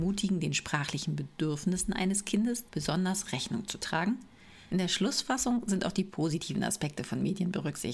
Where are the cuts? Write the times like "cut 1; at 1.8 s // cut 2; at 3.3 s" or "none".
cut 1; at 2.6 s // cut 2; at 4.7 s